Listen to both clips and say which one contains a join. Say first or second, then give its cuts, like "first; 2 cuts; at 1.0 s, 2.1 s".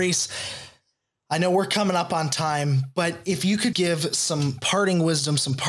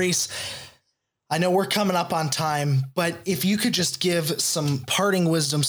first; 1 cut; at 3.7 s